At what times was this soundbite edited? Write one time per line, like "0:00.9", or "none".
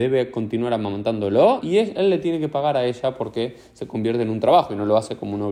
0:01.6